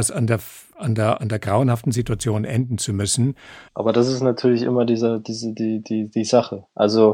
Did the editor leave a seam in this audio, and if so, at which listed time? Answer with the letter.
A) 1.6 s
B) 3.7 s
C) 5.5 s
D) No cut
B